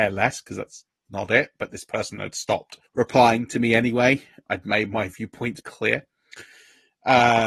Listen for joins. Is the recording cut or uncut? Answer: cut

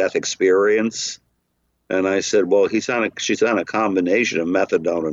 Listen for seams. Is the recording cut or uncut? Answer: uncut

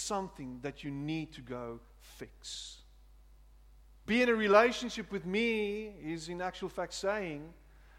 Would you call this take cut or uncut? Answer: cut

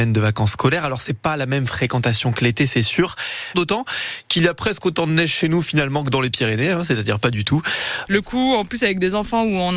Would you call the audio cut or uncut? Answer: cut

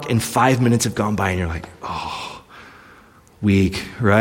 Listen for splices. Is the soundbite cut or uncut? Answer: uncut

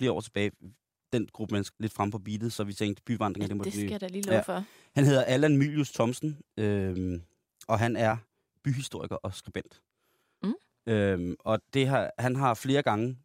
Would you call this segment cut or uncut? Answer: cut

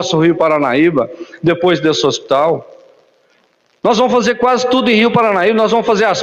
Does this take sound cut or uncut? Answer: uncut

